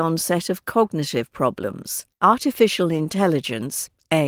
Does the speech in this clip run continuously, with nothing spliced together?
no; 1 cut; at 2.1 s

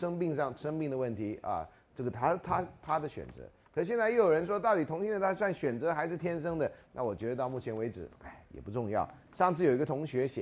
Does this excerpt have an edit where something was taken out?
yes; 1 cut; at 6.8 s

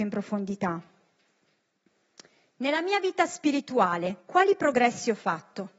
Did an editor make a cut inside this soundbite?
no; 0 cuts

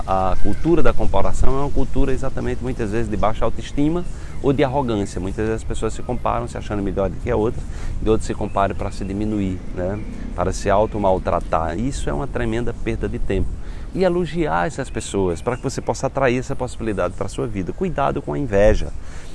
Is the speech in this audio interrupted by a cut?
yes; 1 cut; at 13.9 s

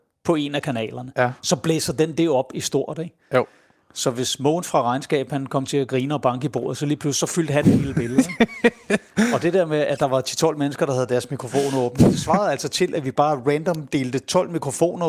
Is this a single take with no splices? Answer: yes; 0 cuts

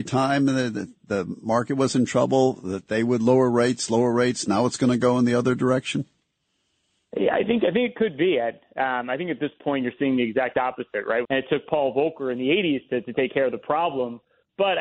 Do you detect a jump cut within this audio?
yes; 1 cut; at 11.2 s

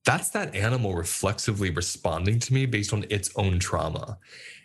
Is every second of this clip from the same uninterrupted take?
yes; 0 cuts

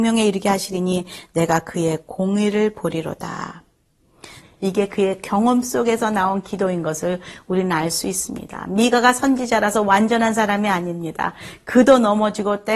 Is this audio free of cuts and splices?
no; 1 cut; at 4.4 s

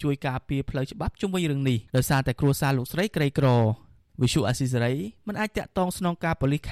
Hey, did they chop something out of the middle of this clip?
yes; 1 cut; at 1.9 s

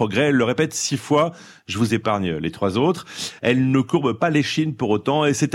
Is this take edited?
yes; 1 cut; at 3.4 s

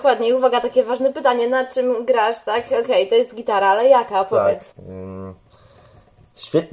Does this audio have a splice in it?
yes; 1 cut; at 4.7 s

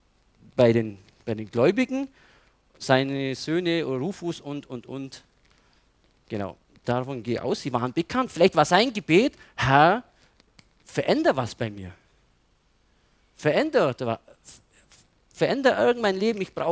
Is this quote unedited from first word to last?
yes; 0 cuts

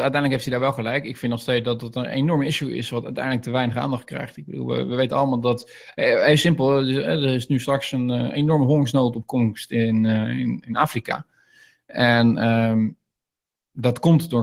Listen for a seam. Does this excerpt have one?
no; 0 cuts

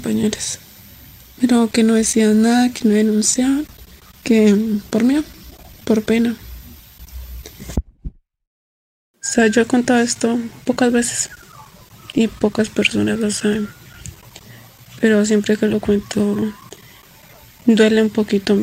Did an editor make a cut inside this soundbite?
yes; 1 cut; at 9.1 s

